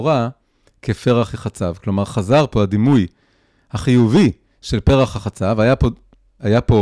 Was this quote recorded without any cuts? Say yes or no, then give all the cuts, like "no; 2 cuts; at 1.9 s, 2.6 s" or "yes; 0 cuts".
yes; 0 cuts